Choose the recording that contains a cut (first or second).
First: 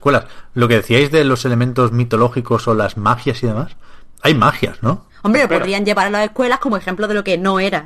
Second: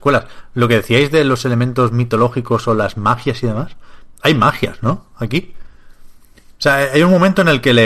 first